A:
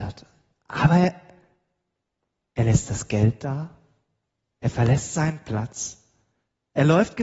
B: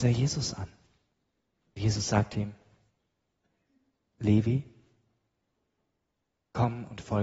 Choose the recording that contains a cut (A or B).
B